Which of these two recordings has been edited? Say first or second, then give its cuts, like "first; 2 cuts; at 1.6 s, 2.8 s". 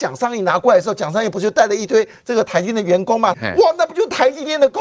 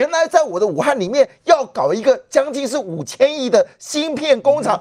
first; 1 cut; at 3.3 s